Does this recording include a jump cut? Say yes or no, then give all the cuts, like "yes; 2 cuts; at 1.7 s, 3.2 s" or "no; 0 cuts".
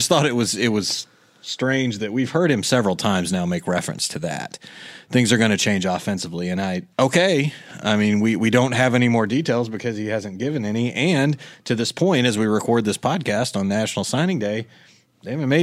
yes; 1 cut; at 6.9 s